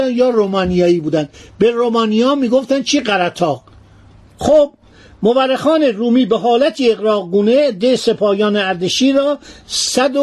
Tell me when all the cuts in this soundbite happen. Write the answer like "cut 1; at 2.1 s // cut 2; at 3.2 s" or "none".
none